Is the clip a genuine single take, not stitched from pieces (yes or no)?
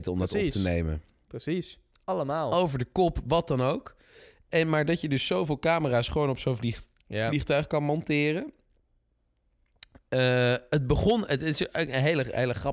yes